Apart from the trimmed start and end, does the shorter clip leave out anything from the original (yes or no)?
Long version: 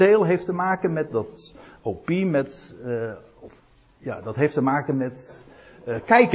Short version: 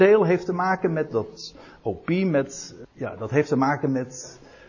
yes